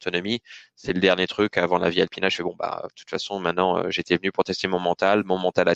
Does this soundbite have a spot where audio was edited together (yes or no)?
no